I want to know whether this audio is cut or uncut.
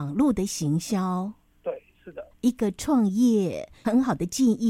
cut